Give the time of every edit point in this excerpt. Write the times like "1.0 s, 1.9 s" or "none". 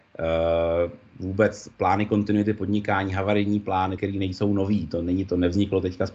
4.0 s